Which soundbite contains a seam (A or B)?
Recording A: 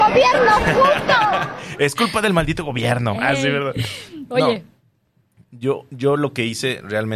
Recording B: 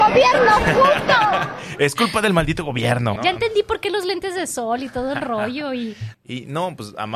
B